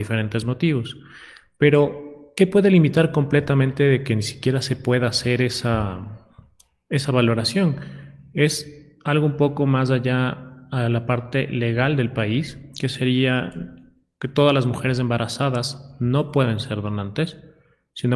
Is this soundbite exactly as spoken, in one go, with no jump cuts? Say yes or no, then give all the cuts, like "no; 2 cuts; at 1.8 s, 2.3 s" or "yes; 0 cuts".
yes; 0 cuts